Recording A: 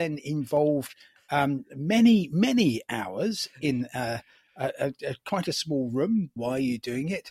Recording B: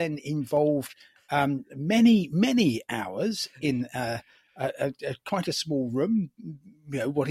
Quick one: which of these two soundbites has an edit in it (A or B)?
A